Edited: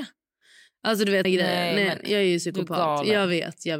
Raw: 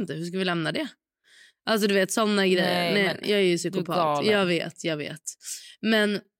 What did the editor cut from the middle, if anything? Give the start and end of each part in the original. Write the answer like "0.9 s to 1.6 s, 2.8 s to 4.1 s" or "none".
2.1 s to 2.4 s